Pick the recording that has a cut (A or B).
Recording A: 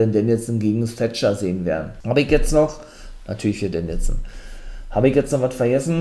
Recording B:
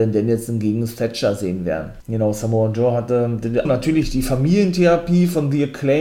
B